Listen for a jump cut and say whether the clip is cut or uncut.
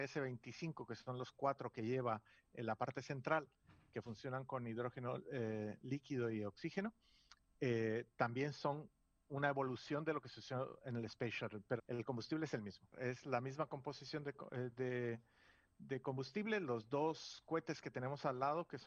cut